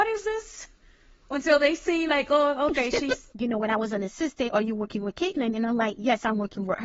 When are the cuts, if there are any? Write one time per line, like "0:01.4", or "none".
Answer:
0:03.3